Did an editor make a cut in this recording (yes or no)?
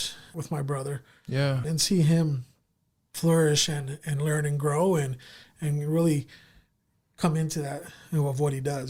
no